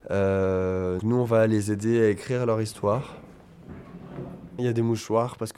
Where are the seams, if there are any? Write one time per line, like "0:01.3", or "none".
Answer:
0:01.0
0:04.6